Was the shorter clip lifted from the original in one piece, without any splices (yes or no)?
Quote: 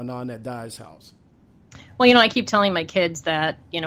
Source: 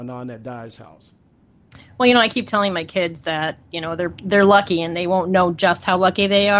yes